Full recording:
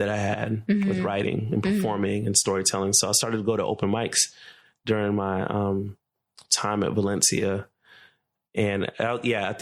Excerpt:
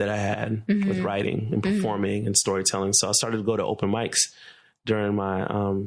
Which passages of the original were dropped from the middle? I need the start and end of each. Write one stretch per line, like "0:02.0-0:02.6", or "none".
none

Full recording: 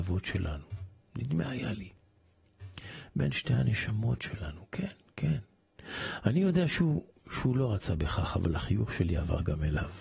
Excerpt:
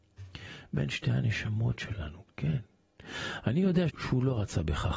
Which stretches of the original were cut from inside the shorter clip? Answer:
0:04.7-0:05.1
0:06.7-0:07.2

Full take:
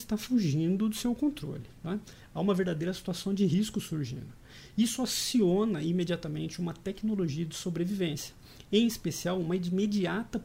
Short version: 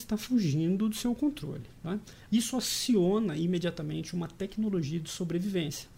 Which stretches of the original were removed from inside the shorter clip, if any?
0:02.3-0:04.7

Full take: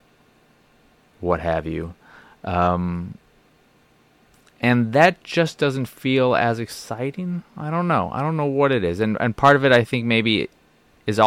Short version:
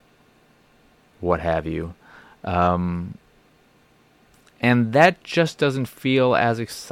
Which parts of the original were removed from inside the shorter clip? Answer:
none

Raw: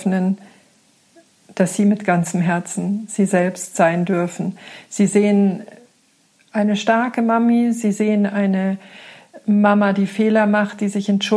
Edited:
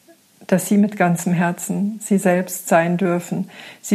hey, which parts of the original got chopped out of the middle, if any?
none

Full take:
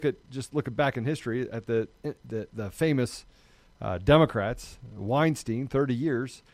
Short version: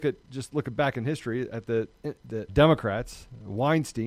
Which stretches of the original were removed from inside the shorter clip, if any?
0:02.5-0:04.0

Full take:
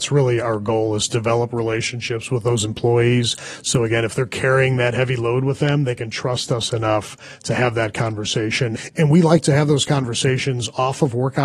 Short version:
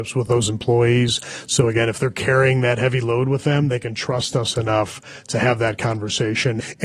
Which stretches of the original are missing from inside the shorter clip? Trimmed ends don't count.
none

